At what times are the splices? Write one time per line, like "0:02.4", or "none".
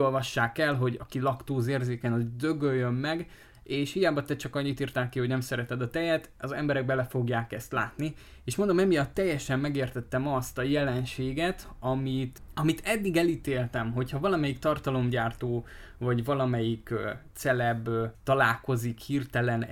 none